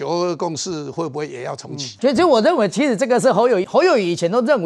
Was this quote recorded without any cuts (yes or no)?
no